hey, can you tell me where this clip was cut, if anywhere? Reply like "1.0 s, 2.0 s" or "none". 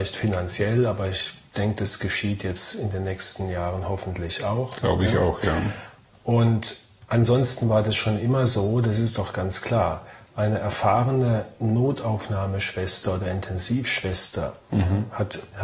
none